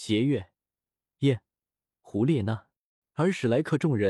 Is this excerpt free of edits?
no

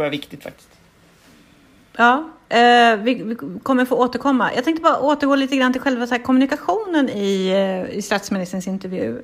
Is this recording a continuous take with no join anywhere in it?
yes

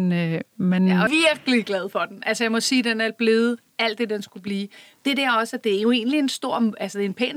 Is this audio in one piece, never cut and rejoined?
no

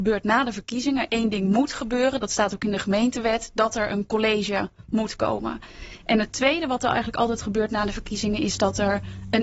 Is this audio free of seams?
yes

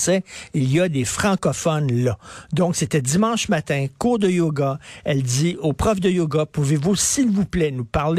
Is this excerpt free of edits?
yes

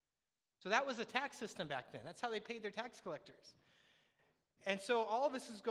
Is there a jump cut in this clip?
no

